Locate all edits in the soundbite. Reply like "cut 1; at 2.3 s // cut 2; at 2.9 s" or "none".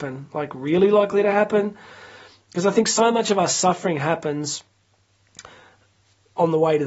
none